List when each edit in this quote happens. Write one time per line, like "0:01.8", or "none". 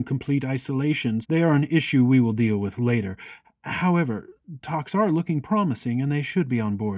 0:01.2

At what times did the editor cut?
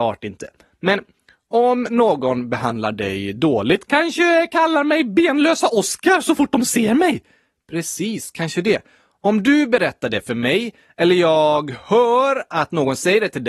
none

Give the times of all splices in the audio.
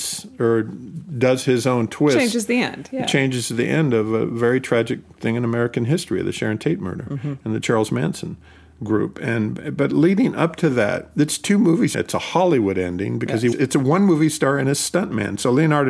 0:11.9
0:13.5

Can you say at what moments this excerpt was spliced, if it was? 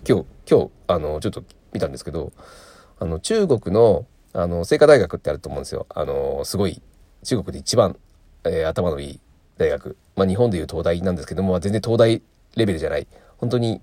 none

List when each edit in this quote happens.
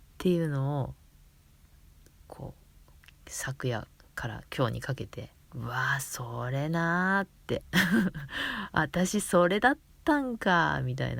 0:05.4

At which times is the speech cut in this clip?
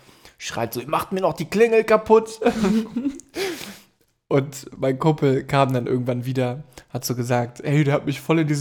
none

